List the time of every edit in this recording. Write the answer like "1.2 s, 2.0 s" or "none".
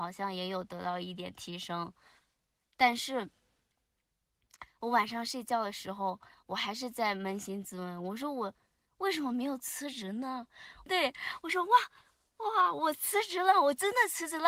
10.9 s